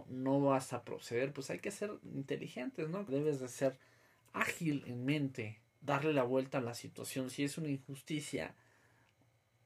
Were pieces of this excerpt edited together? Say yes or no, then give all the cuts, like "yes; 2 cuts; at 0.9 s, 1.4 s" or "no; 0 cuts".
yes; 2 cuts; at 3.1 s, 5.7 s